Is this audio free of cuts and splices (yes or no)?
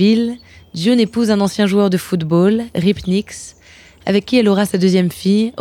yes